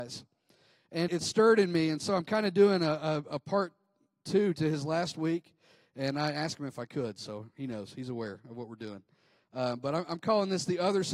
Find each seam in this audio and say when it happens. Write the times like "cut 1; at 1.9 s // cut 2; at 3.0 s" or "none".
cut 1; at 1.1 s